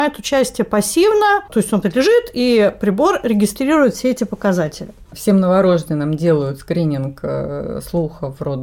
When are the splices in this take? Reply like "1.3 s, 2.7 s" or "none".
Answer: 1.8 s